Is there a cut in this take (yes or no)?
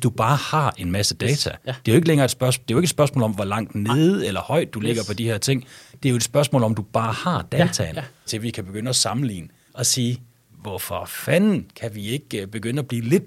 yes